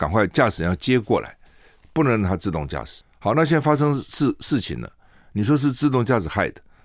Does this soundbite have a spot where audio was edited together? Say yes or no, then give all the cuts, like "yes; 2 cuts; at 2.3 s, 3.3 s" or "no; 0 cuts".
no; 0 cuts